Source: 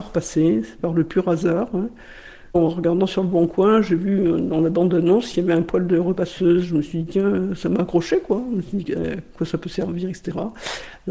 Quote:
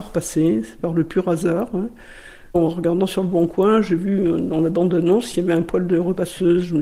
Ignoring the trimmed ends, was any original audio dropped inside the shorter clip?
no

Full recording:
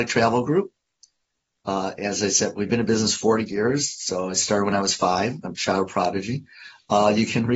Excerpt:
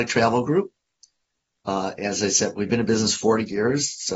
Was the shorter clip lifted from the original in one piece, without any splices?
yes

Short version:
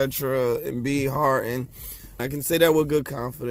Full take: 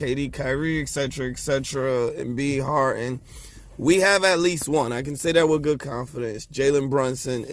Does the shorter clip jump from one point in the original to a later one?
yes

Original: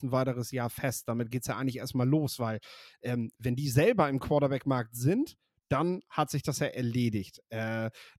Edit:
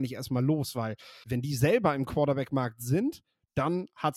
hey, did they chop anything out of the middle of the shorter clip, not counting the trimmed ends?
yes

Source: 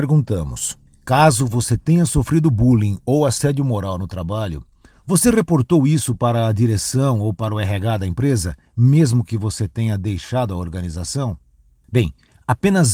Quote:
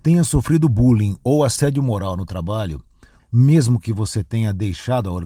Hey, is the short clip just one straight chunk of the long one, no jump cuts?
no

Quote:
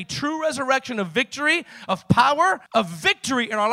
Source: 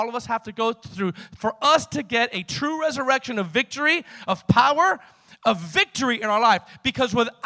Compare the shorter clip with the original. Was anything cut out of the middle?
yes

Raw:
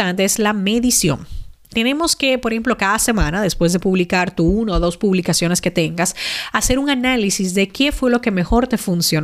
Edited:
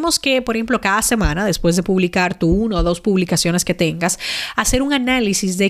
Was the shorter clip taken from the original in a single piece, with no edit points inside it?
yes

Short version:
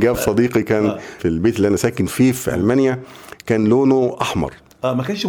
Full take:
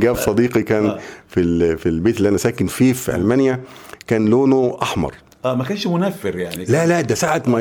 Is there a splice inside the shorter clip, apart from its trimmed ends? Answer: yes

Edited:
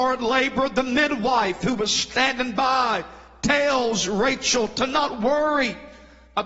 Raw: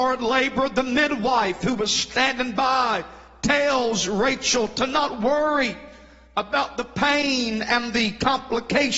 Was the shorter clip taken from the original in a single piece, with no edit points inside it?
yes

